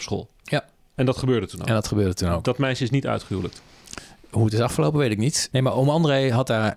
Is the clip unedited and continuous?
no; 1 cut; at 5.5 s

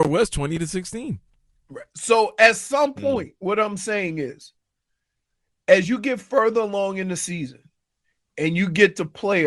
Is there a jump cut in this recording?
no; 0 cuts

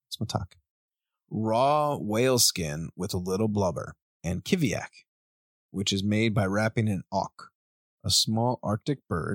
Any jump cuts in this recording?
no; 0 cuts

